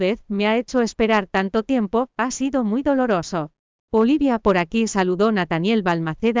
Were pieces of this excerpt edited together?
yes; 1 cut; at 3.8 s

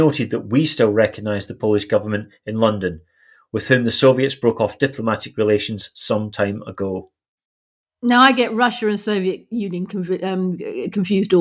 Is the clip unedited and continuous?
yes; 0 cuts

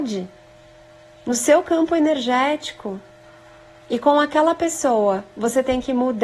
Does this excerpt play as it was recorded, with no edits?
yes; 0 cuts

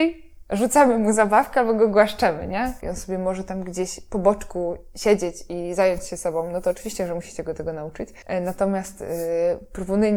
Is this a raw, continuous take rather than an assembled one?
no; 1 cut; at 2.8 s

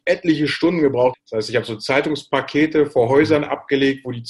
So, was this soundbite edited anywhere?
yes; 1 cut; at 1.1 s

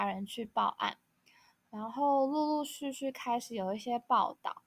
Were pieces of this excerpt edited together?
no; 0 cuts

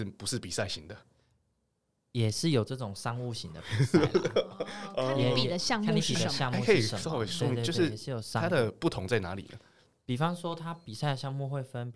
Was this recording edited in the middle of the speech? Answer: no; 0 cuts

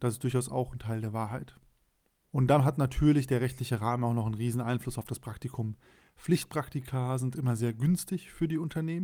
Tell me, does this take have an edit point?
no; 0 cuts

